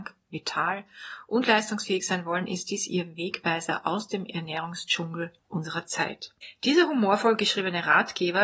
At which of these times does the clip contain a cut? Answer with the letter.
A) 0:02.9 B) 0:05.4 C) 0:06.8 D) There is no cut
B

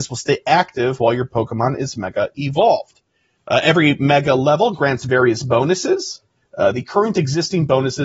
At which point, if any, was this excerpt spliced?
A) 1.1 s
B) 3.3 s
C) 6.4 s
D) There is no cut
C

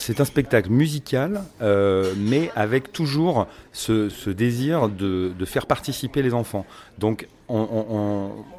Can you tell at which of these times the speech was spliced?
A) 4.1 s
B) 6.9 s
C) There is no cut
A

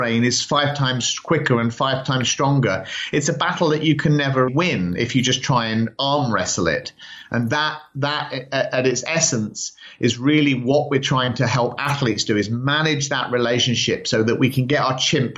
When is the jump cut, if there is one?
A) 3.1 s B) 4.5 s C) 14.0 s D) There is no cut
B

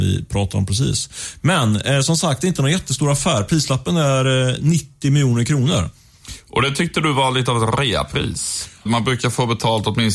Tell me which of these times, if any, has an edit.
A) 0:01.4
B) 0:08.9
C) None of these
B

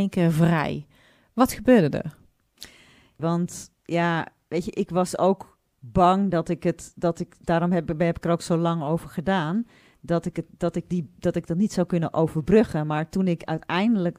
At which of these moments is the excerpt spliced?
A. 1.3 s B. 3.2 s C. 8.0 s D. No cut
B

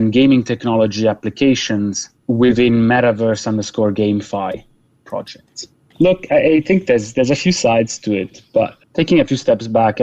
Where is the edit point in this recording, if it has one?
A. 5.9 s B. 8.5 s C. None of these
A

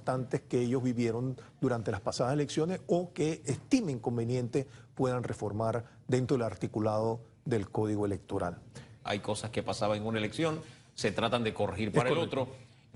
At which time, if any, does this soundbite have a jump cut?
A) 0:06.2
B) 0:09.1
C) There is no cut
B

